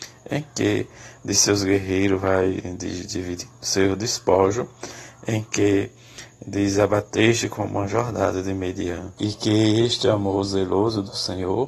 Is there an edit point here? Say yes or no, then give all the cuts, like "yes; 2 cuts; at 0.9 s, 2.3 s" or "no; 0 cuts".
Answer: yes; 1 cut; at 9.2 s